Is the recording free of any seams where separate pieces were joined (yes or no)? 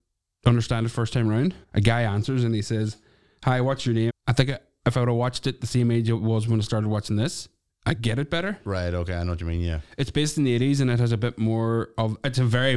no